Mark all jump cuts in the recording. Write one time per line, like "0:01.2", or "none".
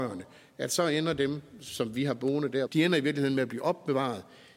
0:02.7

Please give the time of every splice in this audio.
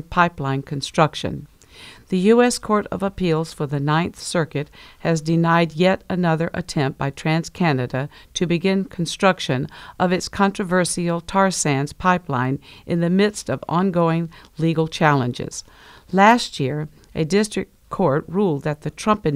none

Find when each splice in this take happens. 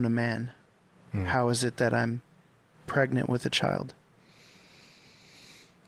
none

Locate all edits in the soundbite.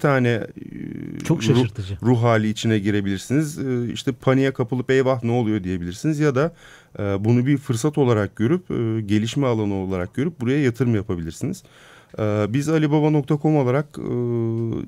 none

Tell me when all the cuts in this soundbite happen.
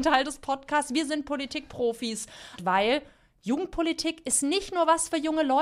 0:02.6

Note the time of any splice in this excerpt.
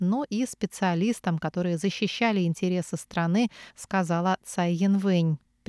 0:03.7

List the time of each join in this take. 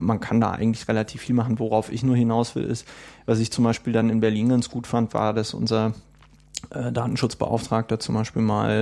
none

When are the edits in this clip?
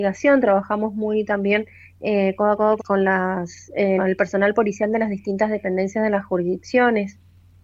0:02.8
0:04.0

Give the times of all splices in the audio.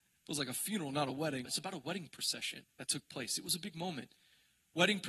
0:01.5
0:02.7

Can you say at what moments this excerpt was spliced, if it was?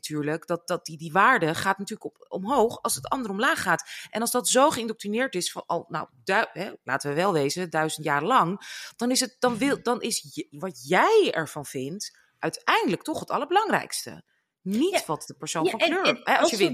none

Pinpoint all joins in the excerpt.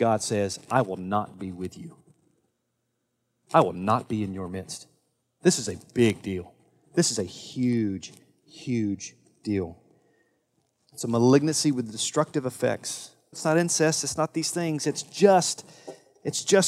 0:13.3

